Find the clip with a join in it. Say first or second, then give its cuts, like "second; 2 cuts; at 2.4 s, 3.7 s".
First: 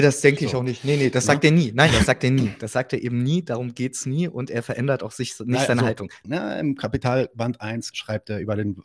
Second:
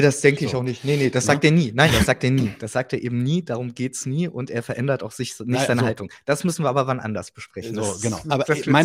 first; 2 cuts; at 6.2 s, 7.9 s